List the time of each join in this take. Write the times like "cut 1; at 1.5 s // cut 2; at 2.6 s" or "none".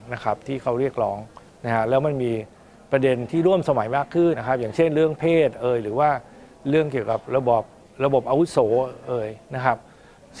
cut 1; at 4.3 s